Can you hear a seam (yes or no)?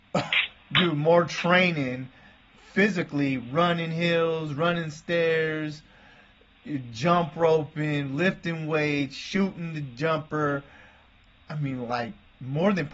no